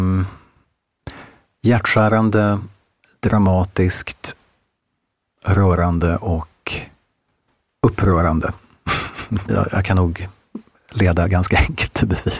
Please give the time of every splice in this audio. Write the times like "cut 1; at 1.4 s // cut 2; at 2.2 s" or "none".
cut 1; at 9.5 s